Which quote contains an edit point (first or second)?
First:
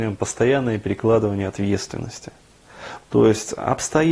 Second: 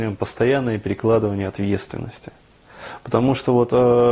first